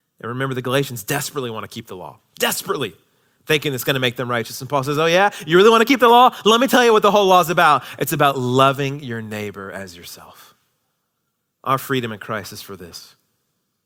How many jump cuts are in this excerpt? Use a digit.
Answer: 0